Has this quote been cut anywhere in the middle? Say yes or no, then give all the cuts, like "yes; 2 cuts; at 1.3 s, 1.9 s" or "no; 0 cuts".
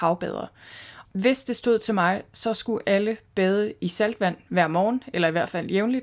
yes; 1 cut; at 1.0 s